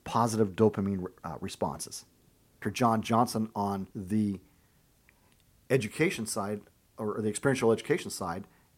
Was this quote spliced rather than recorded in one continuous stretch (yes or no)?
yes